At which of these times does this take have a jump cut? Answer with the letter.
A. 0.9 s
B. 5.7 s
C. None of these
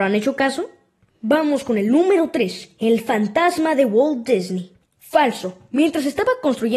C